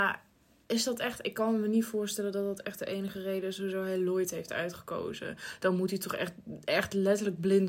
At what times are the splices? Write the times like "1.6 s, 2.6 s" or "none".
none